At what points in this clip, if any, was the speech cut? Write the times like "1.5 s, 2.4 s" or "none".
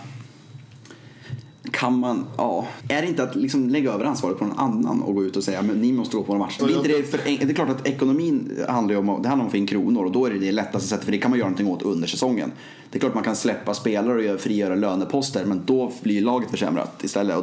2.8 s, 6.6 s